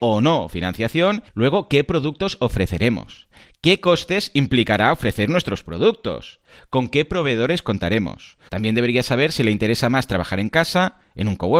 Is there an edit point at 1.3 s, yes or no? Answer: yes